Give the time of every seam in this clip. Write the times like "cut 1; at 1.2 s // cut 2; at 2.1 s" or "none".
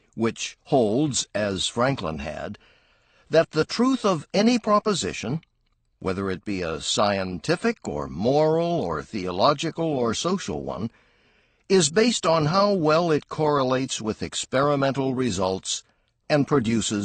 none